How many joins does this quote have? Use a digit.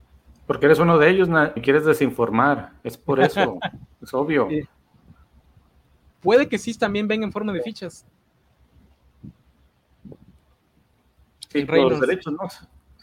3